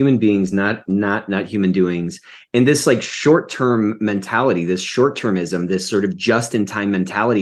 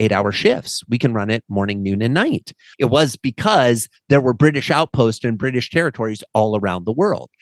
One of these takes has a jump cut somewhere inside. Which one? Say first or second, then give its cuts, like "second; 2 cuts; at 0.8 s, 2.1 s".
second; 1 cut; at 2.7 s